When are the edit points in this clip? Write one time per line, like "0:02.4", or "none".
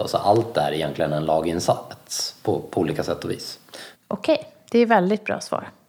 0:03.9